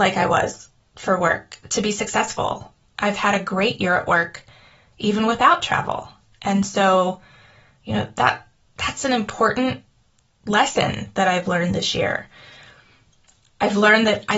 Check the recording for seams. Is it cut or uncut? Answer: uncut